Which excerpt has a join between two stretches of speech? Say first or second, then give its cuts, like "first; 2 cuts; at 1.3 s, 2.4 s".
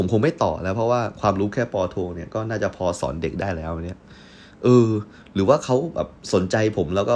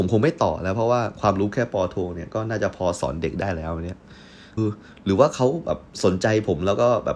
second; 1 cut; at 4.6 s